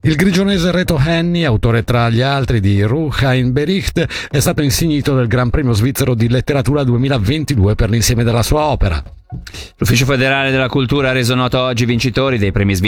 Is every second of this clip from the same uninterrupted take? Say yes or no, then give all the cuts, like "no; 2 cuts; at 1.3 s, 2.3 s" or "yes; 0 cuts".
yes; 0 cuts